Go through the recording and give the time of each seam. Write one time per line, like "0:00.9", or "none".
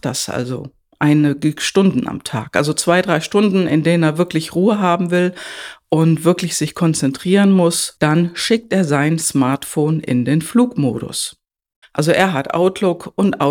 0:08.0
0:11.8